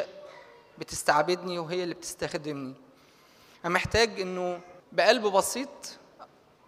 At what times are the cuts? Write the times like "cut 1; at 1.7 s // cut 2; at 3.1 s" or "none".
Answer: cut 1; at 4.8 s